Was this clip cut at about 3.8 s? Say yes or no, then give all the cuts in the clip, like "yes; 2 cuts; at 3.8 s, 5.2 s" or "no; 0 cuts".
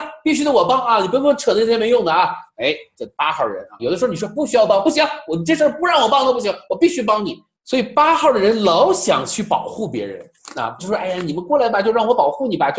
yes; 3 cuts; at 3.8 s, 7.5 s, 10.8 s